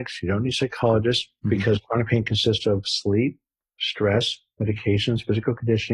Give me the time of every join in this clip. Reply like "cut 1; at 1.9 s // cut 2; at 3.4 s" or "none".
cut 1; at 1.4 s